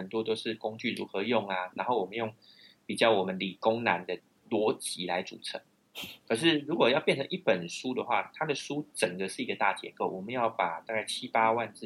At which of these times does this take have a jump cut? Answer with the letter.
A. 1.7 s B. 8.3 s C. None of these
C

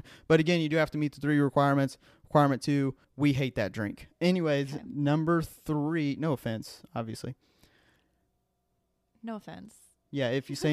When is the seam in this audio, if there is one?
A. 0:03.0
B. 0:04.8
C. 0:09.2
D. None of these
A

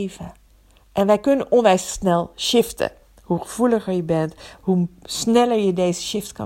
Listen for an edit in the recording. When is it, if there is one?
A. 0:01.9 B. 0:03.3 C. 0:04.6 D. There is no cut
C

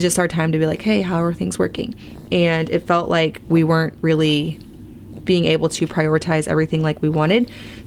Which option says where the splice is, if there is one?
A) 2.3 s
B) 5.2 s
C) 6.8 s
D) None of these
A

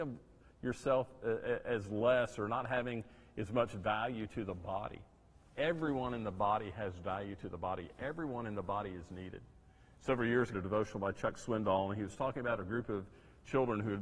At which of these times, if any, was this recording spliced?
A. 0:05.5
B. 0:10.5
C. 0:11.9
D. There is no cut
B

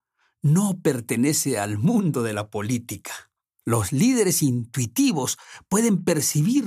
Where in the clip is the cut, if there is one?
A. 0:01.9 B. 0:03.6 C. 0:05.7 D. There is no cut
B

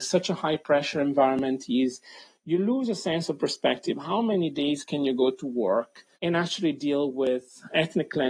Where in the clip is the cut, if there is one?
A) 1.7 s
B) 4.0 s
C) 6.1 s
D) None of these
C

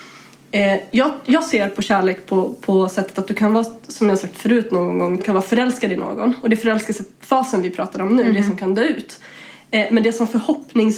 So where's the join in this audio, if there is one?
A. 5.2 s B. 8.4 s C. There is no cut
A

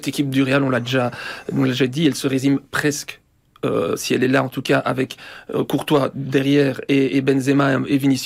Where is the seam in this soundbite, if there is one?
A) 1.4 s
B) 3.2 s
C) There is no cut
C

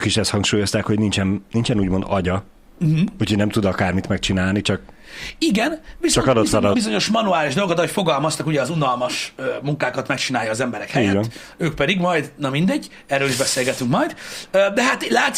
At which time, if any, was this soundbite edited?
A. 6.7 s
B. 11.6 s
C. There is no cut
A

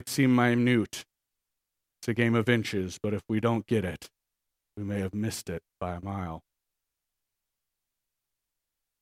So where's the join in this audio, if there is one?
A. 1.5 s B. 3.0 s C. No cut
C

